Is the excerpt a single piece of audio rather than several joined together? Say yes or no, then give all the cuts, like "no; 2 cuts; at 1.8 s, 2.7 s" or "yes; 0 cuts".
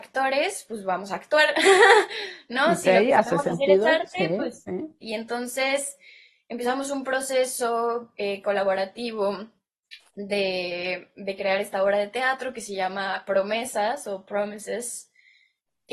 no; 1 cut; at 5.0 s